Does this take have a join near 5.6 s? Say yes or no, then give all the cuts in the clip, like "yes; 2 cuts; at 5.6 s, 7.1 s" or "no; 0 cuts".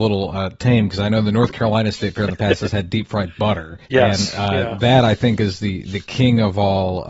no; 1 cut; at 3.8 s